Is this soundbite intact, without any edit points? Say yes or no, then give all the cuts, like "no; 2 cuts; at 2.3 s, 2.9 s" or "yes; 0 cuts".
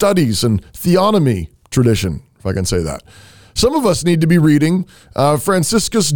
yes; 0 cuts